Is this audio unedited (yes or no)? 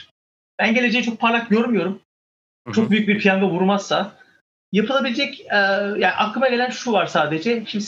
yes